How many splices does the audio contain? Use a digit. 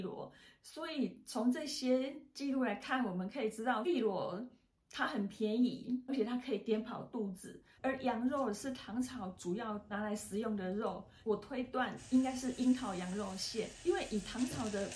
1